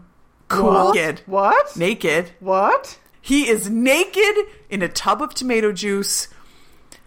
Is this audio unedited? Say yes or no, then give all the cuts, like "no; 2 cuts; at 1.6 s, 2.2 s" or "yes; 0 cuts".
no; 2 cuts; at 0.9 s, 3.1 s